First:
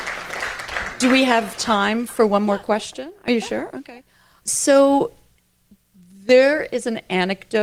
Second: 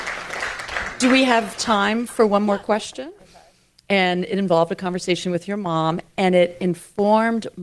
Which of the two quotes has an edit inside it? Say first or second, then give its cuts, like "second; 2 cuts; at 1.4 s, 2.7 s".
second; 1 cut; at 3.2 s